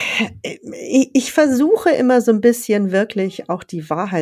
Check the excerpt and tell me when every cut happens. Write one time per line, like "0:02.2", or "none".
none